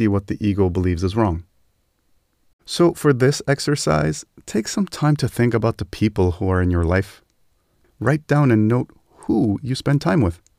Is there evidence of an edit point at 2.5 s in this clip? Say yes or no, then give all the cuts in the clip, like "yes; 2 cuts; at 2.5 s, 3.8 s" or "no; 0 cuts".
yes; 1 cut; at 2.5 s